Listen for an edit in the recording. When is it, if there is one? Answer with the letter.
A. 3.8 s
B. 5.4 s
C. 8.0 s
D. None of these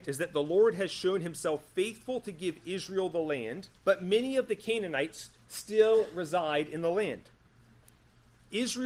A